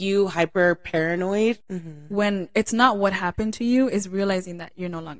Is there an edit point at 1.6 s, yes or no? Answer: yes